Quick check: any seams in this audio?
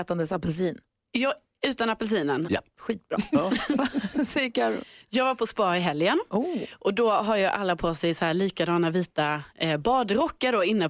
yes; 1 cut; at 2.4 s

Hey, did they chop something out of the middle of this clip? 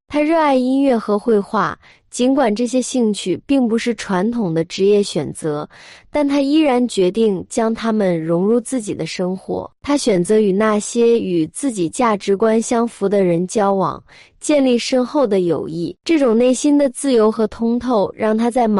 yes; 2 cuts; at 9.8 s, 16.0 s

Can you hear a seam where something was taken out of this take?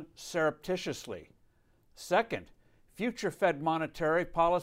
no; 0 cuts

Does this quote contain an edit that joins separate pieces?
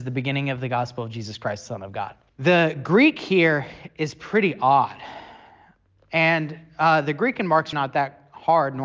yes; 2 cuts; at 2.3 s, 7.7 s

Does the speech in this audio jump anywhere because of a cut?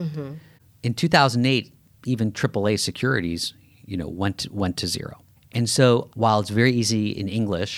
yes; 1 cut; at 6.1 s

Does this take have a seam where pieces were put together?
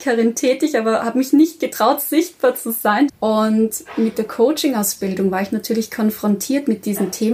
yes; 1 cut; at 3.1 s

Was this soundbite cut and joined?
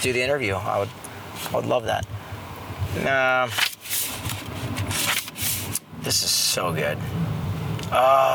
no; 0 cuts

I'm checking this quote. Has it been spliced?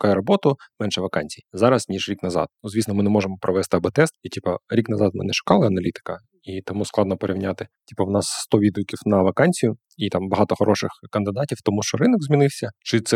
no; 0 cuts

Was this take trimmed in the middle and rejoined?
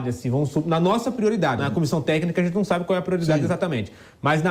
yes; 1 cut; at 1.6 s

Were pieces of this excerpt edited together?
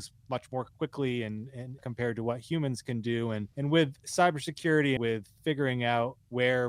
yes; 3 cuts; at 1.8 s, 3.5 s, 5.0 s

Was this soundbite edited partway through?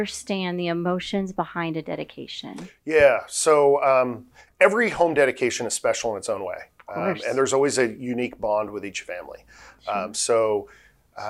no; 0 cuts

